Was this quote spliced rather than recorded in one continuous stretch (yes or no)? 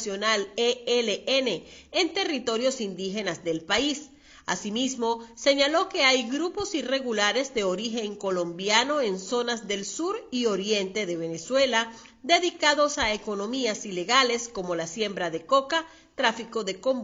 no